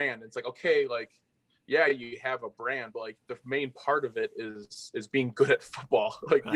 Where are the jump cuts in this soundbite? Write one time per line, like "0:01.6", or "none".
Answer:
none